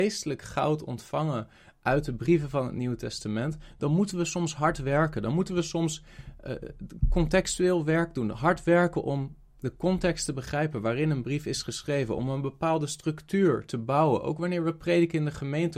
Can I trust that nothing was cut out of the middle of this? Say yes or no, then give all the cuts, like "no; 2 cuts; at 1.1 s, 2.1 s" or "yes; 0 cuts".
no; 1 cut; at 8.3 s